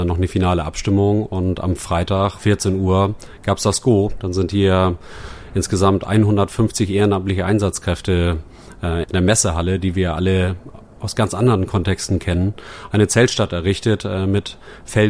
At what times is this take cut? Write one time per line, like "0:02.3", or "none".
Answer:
0:02.4
0:09.0